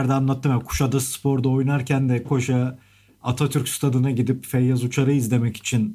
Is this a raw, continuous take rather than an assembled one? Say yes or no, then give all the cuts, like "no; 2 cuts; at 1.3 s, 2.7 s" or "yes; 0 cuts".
no; 1 cut; at 2.2 s